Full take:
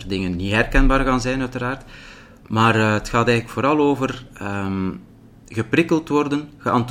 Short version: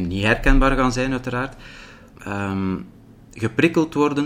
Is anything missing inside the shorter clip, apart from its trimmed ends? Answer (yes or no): yes